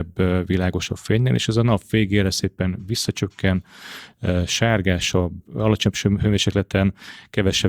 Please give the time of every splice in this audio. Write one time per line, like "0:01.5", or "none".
none